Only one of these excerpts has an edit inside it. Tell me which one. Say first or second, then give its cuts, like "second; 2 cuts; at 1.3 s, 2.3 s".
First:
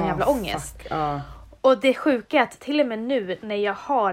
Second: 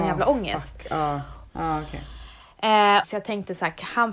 second; 2 cuts; at 1.5 s, 3.0 s